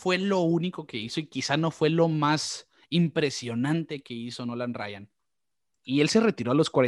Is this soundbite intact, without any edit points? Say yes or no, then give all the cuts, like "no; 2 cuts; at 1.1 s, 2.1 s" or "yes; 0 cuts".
no; 1 cut; at 5.7 s